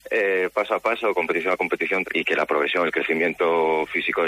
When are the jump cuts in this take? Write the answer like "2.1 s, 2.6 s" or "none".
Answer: 2.0 s